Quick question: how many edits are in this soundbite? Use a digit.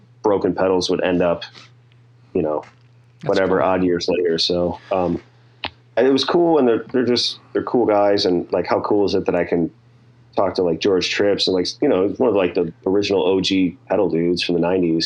1